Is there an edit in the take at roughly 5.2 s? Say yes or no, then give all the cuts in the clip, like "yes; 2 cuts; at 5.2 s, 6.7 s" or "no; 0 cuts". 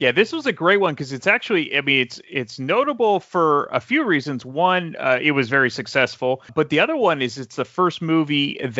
no; 1 cut; at 6.5 s